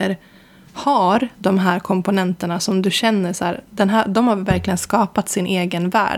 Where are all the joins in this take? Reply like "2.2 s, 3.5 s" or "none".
none